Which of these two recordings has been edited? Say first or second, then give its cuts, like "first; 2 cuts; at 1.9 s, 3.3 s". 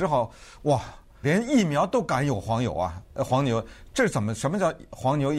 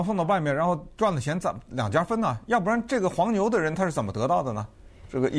first; 1 cut; at 1.2 s